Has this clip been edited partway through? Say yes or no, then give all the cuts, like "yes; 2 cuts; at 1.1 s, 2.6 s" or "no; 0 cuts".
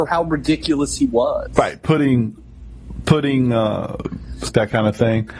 yes; 1 cut; at 4.5 s